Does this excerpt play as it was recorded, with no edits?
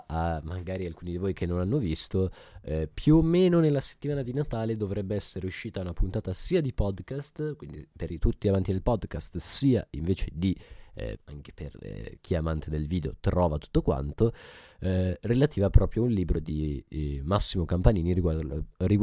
no; 1 cut; at 11.2 s

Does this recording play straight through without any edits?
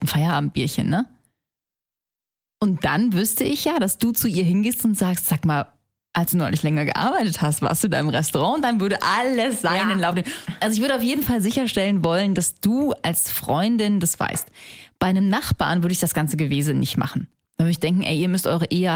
yes; 0 cuts

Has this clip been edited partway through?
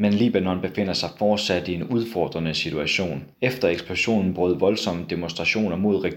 yes; 1 cut; at 3.3 s

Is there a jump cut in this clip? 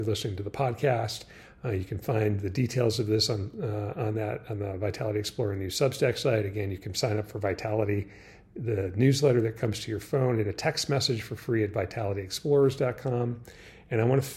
no; 0 cuts

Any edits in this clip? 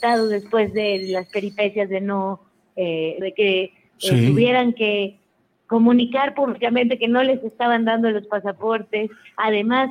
yes; 1 cut; at 3.2 s

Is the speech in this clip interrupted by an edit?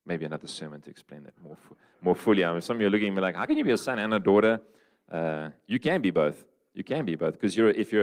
no; 0 cuts

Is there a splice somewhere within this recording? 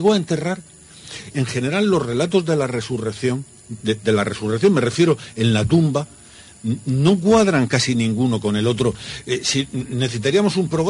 yes; 2 cuts; at 1.3 s, 3.8 s

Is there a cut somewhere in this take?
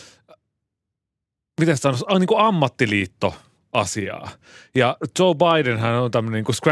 no; 0 cuts

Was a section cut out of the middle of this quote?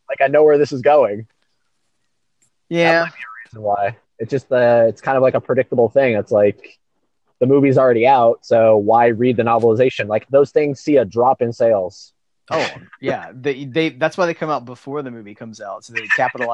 yes; 1 cut; at 10.3 s

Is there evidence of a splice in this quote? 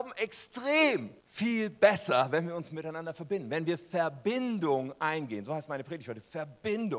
yes; 1 cut; at 1.2 s

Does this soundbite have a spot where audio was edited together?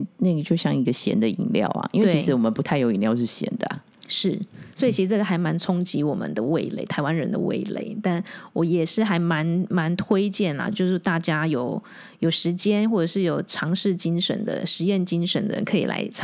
no; 0 cuts

